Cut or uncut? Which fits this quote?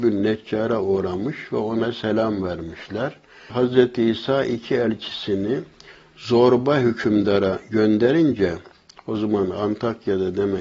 cut